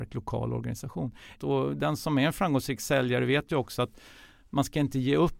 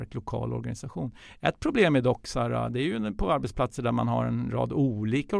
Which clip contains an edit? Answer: first; 1 cut; at 1.4 s

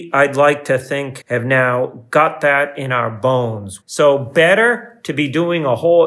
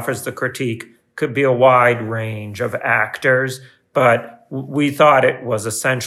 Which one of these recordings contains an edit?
first; 2 cuts; at 1.2 s, 3.8 s

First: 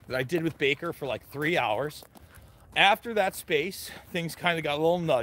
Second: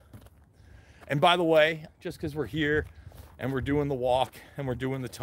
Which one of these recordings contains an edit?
second; 1 cut; at 1.9 s

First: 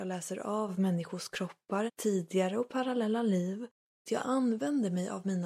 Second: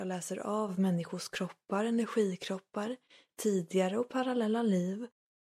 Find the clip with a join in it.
first; 2 cuts; at 1.9 s, 4.0 s

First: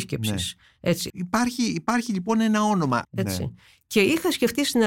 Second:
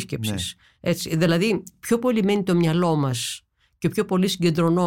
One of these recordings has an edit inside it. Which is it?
first; 2 cuts; at 1.1 s, 3.0 s

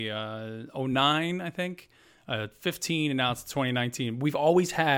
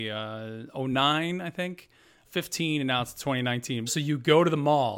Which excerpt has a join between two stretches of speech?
second; 2 cuts; at 2.2 s, 3.9 s

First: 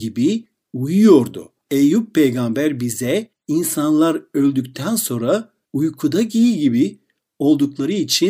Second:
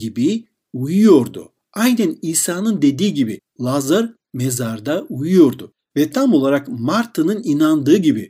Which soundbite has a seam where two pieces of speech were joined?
first; 2 cuts; at 1.6 s, 5.6 s

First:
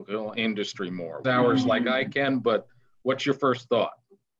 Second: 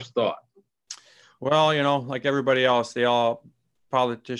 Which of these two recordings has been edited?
first; 1 cut; at 1.2 s

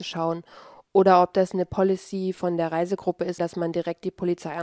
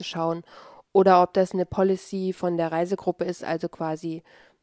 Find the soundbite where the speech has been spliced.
first; 1 cut; at 3.4 s

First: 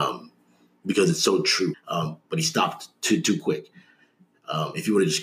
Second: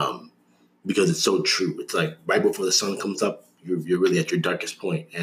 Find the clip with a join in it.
first; 1 cut; at 1.7 s

